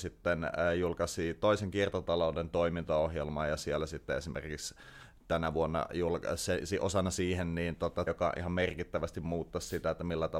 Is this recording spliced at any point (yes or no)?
yes